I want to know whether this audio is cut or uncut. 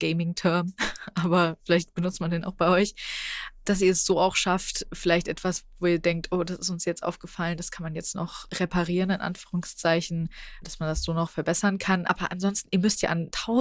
uncut